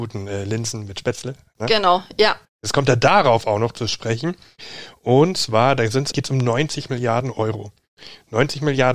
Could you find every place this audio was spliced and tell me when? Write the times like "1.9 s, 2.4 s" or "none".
2.4 s, 6.1 s